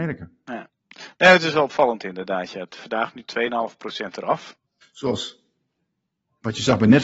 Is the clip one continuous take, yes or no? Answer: no